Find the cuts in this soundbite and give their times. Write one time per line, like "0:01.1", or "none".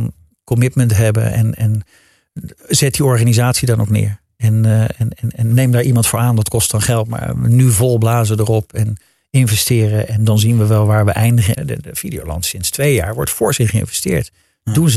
0:11.5